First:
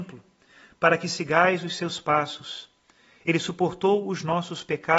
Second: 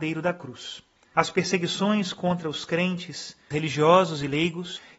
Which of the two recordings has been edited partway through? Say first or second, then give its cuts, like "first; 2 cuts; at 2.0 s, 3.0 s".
second; 2 cuts; at 1.1 s, 3.5 s